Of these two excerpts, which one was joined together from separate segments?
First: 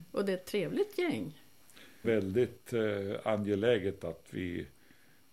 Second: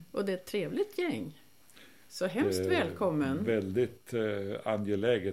first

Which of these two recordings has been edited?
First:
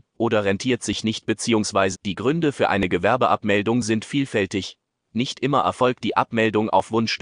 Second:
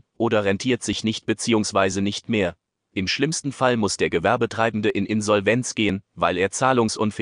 first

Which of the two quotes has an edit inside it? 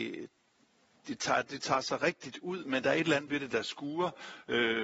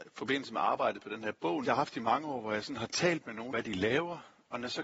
second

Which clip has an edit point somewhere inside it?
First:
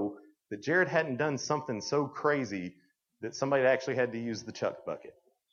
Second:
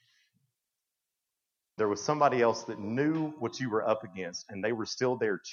second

